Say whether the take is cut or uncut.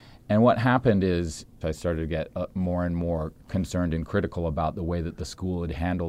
cut